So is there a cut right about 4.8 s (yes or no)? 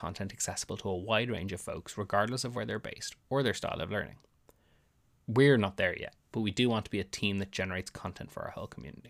no